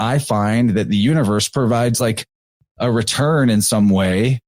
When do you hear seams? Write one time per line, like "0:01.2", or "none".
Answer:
none